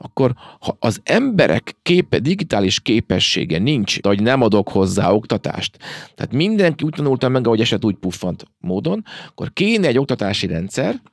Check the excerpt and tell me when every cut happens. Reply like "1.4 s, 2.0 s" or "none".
4.0 s